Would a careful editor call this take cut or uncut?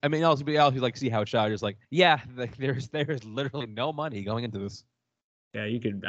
cut